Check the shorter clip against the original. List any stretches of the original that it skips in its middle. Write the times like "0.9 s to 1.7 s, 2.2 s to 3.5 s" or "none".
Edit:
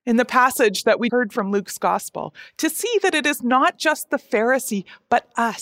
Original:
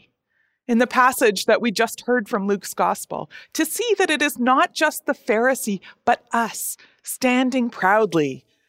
1.7 s to 2.0 s